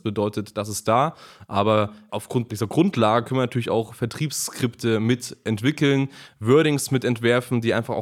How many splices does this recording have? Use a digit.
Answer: 0